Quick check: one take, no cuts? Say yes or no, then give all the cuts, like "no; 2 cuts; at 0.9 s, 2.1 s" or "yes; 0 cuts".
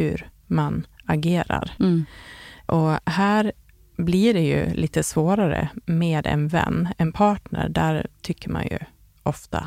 yes; 0 cuts